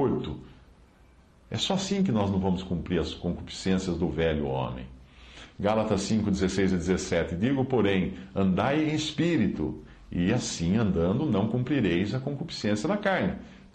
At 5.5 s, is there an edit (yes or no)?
no